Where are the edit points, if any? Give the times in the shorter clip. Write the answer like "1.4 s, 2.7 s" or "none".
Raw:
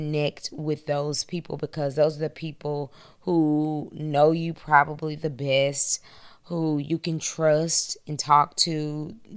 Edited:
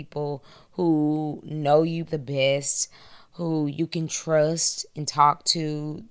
2.1 s